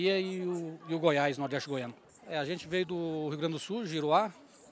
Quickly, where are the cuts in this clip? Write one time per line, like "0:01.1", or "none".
0:02.1